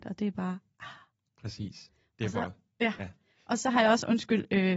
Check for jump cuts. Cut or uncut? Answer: uncut